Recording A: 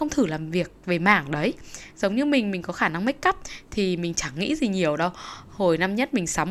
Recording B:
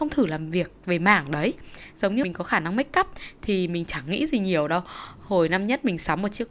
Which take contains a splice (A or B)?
B